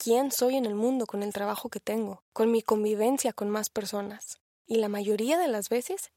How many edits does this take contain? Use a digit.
1